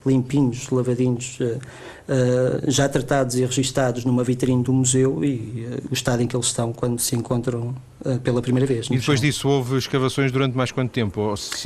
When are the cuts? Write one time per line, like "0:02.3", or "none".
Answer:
none